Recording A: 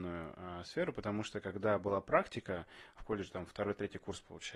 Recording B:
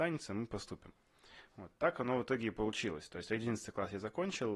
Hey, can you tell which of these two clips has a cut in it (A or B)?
A